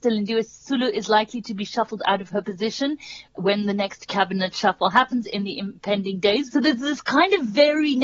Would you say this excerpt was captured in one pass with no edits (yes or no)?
no